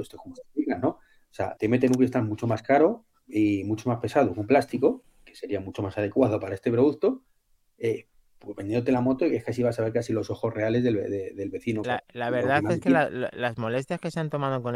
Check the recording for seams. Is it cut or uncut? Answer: cut